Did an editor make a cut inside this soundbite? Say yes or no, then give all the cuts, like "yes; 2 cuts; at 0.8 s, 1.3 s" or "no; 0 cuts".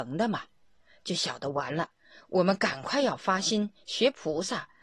no; 0 cuts